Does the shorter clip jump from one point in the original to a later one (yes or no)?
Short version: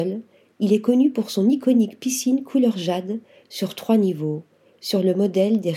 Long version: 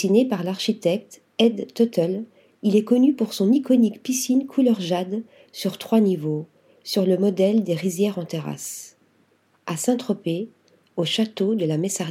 no